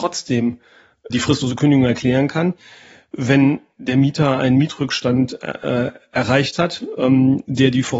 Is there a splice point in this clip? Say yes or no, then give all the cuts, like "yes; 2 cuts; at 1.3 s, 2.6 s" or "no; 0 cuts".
yes; 1 cut; at 1.1 s